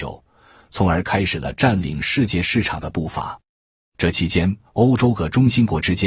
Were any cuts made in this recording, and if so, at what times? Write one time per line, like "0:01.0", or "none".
0:04.7